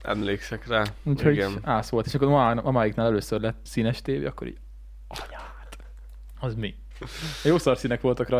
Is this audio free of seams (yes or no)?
no